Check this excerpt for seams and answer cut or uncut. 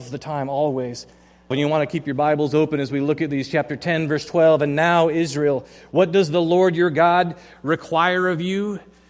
cut